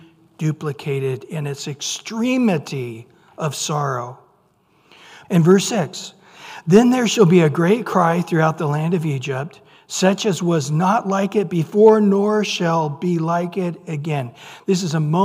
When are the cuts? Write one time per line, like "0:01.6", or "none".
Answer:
0:05.2